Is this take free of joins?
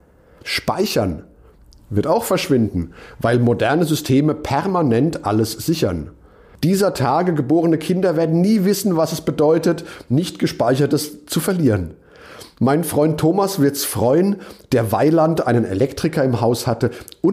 yes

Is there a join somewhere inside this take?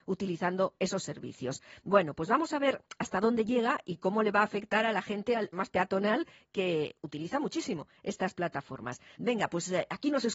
yes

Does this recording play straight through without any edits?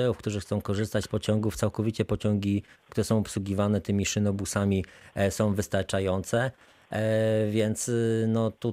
yes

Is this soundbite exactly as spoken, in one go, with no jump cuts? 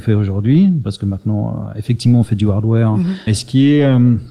no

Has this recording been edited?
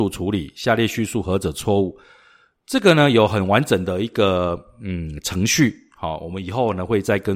no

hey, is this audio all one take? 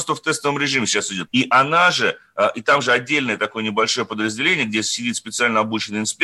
no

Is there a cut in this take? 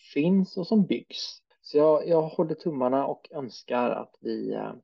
yes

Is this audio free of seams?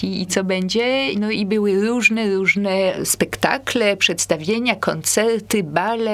yes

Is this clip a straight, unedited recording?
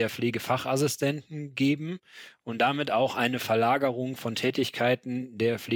yes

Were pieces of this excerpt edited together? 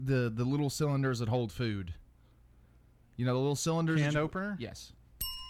no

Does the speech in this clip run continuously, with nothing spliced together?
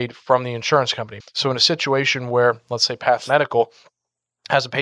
no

